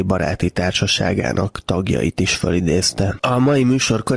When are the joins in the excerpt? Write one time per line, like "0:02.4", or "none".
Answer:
0:03.2